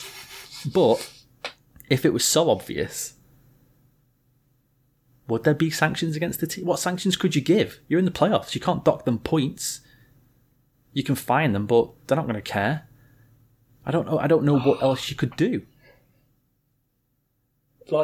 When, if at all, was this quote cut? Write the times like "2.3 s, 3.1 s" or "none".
none